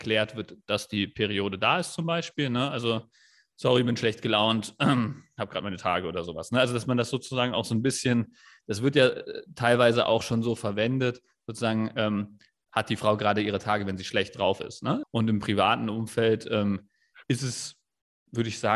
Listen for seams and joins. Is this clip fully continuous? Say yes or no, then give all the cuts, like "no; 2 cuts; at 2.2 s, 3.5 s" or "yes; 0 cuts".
no; 1 cut; at 15.0 s